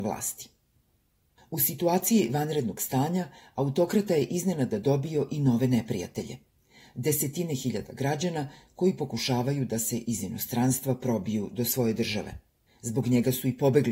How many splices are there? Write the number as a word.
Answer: one